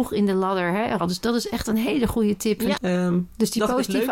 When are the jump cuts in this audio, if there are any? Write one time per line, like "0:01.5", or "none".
0:01.0
0:02.8